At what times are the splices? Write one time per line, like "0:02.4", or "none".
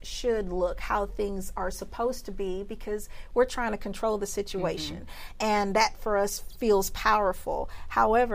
none